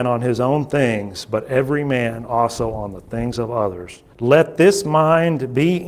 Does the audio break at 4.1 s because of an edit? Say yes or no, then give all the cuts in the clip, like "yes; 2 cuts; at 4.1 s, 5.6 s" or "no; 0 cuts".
yes; 1 cut; at 4.1 s